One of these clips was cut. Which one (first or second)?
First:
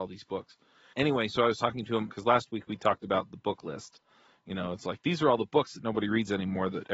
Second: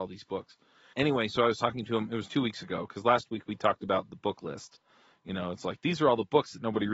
first